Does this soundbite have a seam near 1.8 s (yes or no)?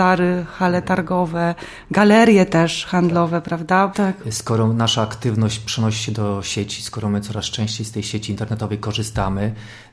no